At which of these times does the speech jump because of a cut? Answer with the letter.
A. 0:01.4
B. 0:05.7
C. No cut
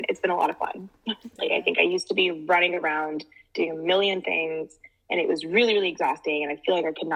A